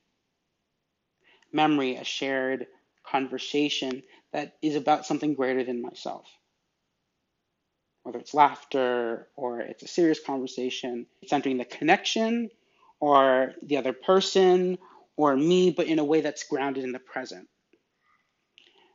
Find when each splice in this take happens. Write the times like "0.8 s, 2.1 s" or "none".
11.2 s